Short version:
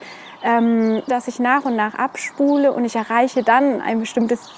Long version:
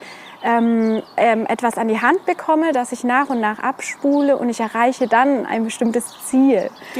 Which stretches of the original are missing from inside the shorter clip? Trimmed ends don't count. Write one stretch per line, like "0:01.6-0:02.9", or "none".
0:01.1-0:02.7